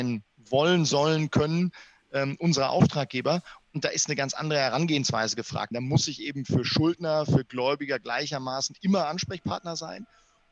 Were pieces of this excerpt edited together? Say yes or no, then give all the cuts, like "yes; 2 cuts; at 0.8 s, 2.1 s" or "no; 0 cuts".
yes; 1 cut; at 5.7 s